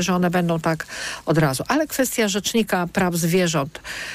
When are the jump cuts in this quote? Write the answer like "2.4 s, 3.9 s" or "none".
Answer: none